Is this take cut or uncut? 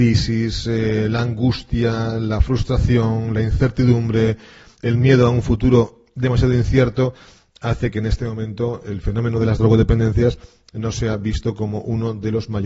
uncut